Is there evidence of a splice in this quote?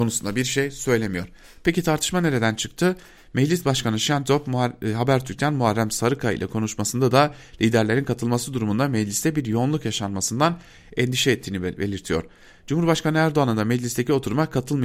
no; 0 cuts

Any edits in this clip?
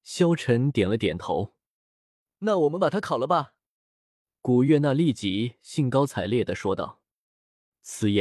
no; 0 cuts

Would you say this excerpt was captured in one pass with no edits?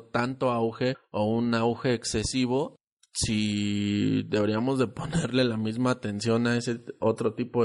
yes; 0 cuts

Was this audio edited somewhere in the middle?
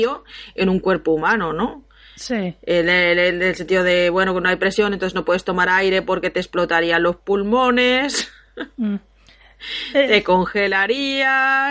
no; 0 cuts

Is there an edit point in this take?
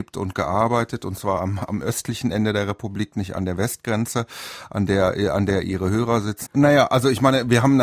yes; 1 cut; at 6.5 s

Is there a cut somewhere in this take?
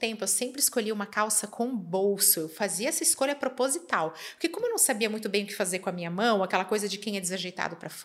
no; 0 cuts

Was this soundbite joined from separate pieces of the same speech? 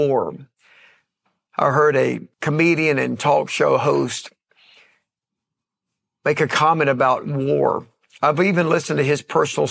yes; 1 cut; at 2.3 s

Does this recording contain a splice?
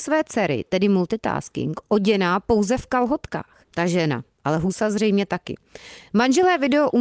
yes; 1 cut; at 3.6 s

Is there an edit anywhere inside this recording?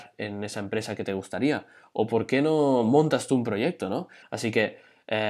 yes; 1 cut; at 4.2 s

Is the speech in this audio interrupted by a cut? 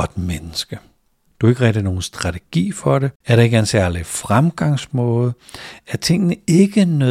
yes; 1 cut; at 1.3 s

